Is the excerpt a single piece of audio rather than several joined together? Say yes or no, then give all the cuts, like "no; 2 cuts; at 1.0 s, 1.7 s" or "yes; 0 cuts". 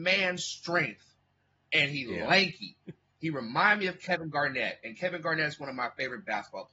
yes; 0 cuts